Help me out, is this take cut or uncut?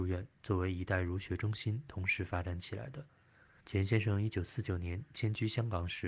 cut